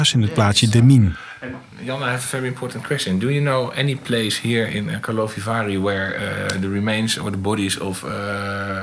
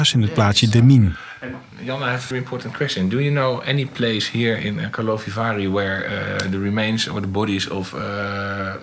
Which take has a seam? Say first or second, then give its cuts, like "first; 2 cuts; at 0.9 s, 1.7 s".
second; 1 cut; at 2.3 s